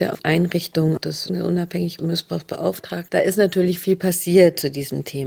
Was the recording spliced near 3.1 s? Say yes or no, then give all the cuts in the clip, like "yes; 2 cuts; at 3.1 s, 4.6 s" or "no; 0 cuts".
no; 0 cuts